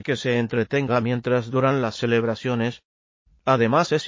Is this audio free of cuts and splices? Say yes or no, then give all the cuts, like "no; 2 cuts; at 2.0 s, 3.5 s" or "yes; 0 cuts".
yes; 0 cuts